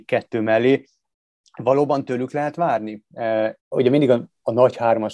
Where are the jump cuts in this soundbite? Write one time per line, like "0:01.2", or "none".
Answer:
0:03.6